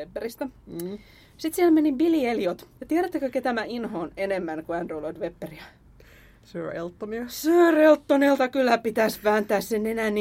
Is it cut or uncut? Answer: uncut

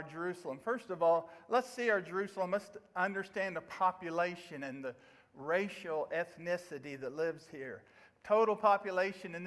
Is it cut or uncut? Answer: uncut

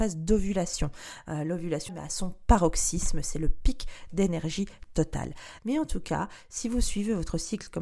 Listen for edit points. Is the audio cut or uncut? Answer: cut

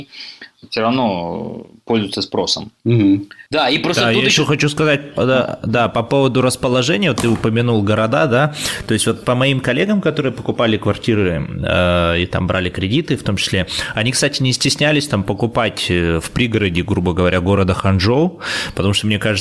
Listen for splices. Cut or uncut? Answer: uncut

